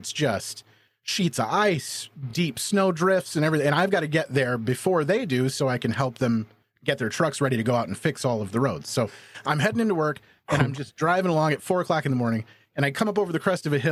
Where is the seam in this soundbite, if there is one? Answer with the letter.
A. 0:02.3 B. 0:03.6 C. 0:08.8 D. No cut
D